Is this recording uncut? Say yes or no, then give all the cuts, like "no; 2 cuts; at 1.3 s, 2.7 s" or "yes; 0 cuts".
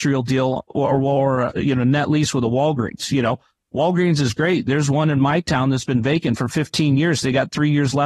yes; 0 cuts